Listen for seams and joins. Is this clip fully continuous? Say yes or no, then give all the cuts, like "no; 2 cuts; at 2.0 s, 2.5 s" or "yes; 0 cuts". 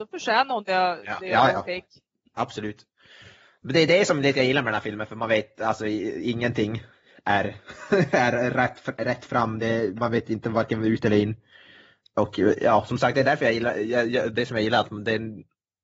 yes; 0 cuts